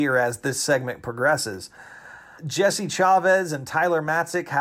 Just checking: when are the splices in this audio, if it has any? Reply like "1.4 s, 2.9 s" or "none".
2.4 s